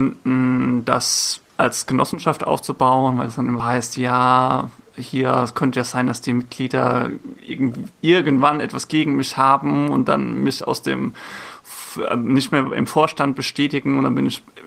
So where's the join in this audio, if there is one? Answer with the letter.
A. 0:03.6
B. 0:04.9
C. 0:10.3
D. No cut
A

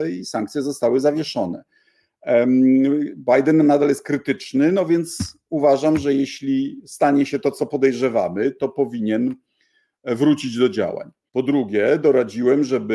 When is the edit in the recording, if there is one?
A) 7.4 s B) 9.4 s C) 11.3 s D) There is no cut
C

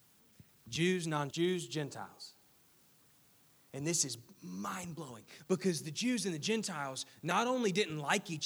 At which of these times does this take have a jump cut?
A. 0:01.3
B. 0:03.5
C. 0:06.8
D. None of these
A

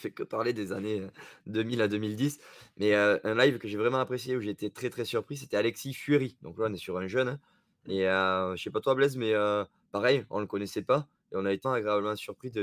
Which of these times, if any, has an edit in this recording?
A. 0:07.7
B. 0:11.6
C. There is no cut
B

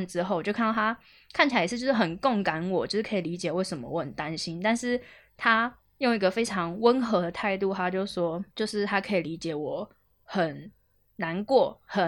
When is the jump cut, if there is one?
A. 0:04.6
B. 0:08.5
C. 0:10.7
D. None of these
B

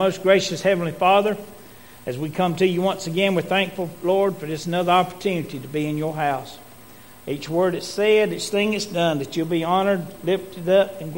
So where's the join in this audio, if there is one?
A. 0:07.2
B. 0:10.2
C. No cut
A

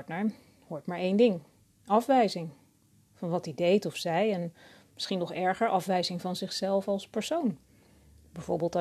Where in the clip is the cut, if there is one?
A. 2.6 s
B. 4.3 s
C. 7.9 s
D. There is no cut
D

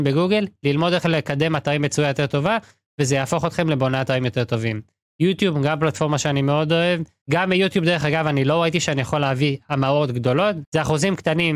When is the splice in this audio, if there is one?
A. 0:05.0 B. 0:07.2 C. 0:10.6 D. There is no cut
B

